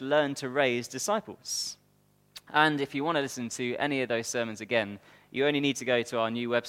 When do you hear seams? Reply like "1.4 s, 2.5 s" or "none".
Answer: none